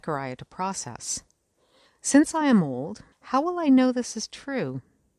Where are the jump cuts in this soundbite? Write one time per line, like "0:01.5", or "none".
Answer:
0:01.9
0:03.1